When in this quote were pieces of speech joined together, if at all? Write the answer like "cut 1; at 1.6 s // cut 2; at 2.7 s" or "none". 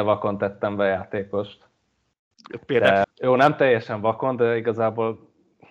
cut 1; at 3.0 s